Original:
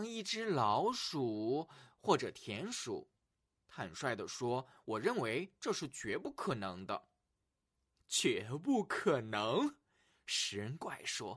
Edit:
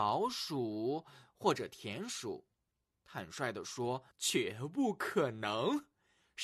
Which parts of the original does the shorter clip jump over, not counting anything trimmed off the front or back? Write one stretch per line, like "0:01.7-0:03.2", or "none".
0:04.7-0:08.0